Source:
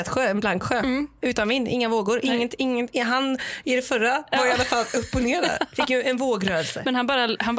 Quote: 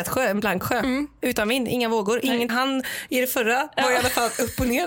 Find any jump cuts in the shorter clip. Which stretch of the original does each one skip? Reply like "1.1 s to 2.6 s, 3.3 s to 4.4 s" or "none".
2.5 s to 3.0 s